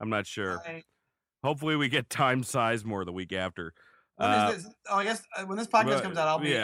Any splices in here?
no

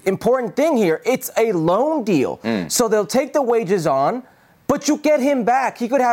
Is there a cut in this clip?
no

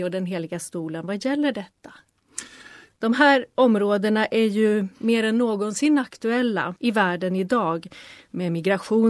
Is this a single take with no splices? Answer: no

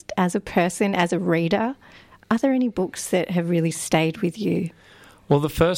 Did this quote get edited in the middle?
no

